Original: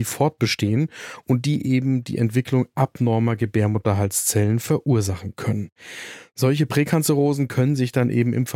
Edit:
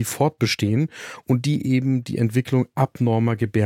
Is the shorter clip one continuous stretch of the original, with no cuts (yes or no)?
yes